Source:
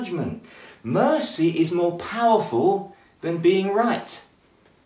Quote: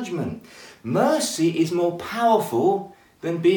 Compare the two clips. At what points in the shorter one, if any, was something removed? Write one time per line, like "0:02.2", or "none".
none